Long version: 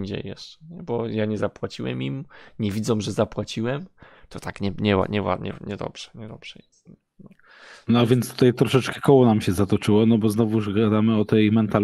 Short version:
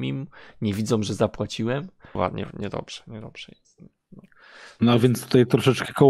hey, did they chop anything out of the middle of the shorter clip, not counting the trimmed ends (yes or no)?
yes